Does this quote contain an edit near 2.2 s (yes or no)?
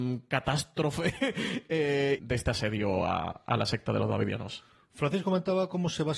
yes